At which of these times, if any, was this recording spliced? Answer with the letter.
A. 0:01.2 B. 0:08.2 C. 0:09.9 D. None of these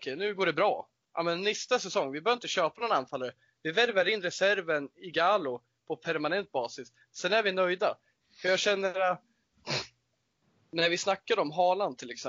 B